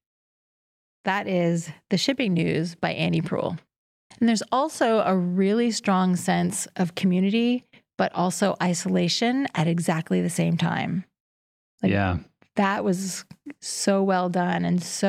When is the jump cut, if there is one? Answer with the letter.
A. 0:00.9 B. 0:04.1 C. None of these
B